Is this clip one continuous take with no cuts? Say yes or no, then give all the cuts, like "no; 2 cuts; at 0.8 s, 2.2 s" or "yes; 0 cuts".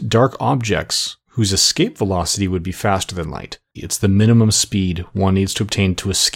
no; 1 cut; at 3.7 s